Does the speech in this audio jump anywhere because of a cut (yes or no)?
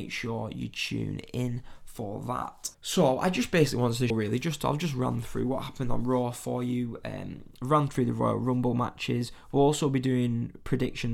yes